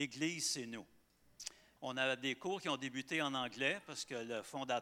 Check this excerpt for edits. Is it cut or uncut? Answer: cut